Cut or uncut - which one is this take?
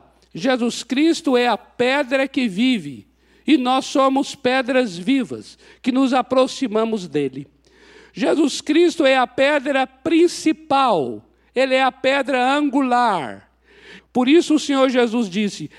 cut